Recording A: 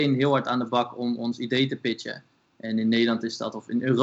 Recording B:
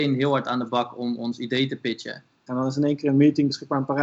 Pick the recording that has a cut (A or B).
B